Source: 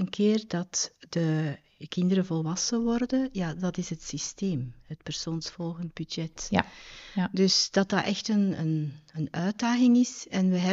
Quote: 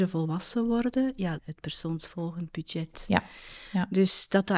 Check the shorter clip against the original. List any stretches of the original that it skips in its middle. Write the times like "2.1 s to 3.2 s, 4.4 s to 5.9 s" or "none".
3.5 s to 4.8 s